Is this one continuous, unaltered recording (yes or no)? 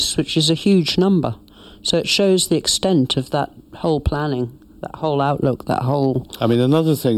yes